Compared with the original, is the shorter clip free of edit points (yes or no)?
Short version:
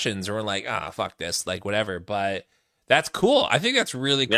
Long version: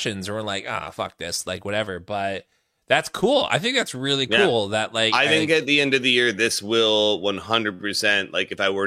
yes